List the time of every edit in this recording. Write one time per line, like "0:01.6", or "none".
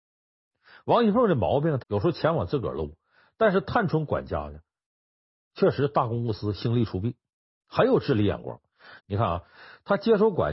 0:01.8
0:09.0